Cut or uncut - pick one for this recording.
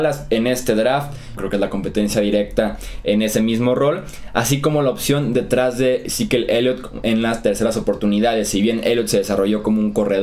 cut